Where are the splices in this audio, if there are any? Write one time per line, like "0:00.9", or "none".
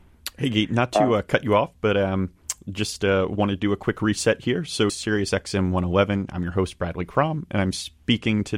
0:04.9